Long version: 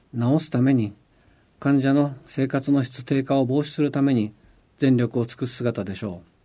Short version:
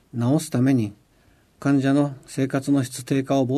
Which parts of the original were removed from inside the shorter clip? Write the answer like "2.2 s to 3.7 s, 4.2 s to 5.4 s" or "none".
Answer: none